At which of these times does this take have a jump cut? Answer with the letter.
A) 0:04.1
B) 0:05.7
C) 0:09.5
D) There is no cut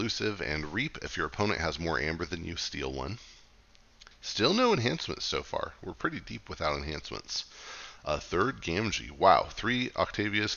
A